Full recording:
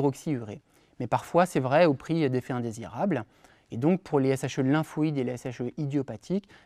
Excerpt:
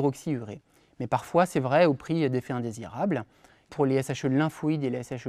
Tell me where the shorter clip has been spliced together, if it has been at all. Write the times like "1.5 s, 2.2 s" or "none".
3.7 s